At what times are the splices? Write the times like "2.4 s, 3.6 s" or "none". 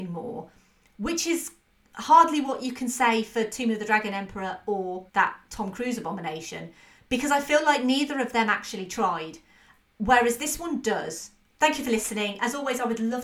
11.5 s